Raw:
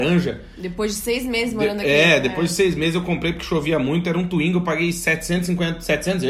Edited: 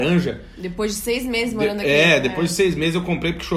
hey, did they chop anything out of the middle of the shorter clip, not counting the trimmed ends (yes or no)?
no